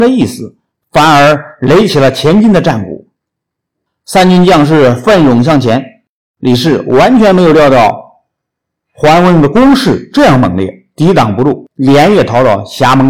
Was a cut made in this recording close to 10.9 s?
no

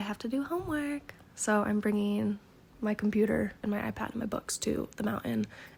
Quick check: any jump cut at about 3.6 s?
yes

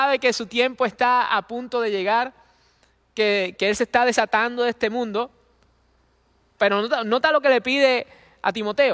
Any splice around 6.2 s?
no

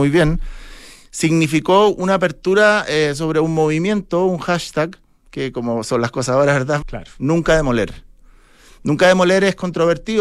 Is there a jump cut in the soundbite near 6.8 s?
yes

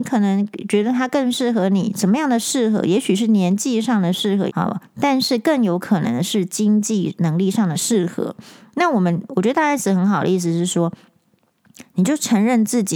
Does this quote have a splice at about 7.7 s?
yes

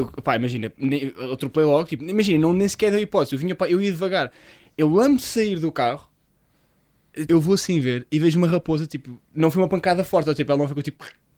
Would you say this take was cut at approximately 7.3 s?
yes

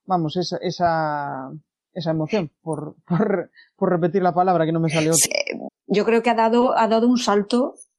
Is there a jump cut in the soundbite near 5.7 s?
yes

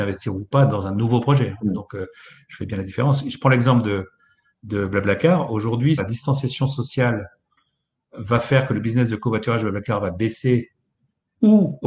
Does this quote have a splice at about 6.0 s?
yes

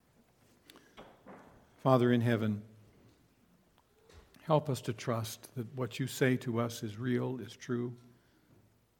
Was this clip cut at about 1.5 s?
no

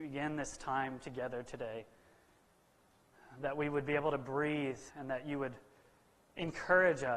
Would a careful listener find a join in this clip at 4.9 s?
yes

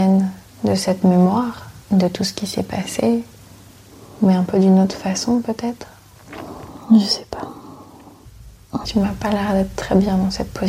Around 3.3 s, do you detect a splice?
no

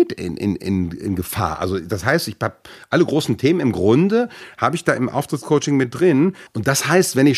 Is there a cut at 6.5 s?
yes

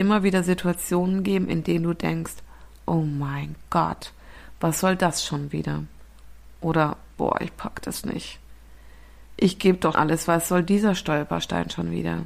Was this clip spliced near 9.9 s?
yes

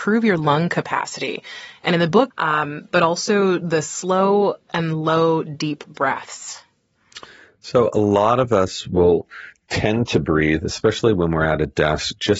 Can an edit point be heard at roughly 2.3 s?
yes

